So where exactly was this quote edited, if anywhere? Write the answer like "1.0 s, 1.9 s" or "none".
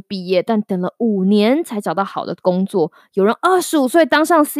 none